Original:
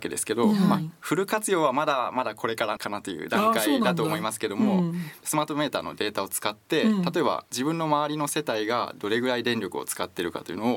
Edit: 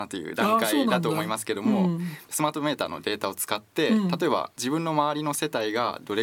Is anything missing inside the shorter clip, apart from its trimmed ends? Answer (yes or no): no